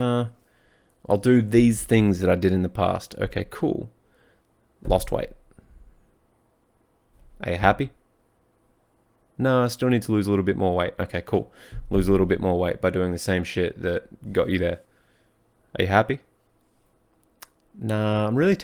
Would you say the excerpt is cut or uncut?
uncut